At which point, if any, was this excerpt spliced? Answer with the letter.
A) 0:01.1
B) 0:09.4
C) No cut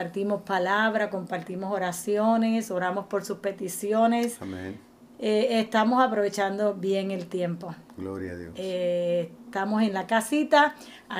C